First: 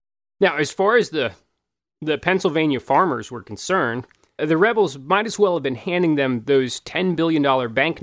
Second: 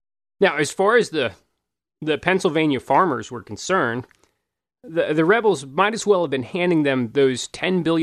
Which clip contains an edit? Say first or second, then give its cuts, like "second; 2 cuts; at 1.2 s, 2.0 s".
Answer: first; 1 cut; at 4.4 s